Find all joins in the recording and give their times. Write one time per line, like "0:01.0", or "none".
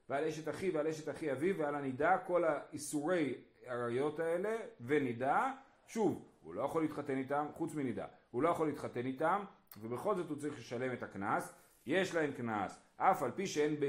none